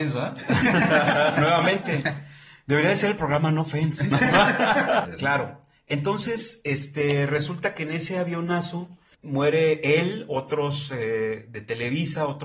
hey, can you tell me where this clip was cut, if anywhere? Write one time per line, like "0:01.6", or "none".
0:05.1